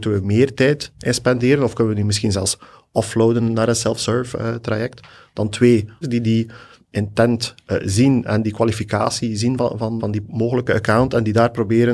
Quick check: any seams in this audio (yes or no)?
yes